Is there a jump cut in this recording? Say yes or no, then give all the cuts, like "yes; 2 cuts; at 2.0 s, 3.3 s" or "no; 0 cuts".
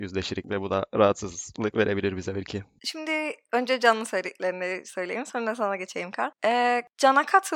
no; 0 cuts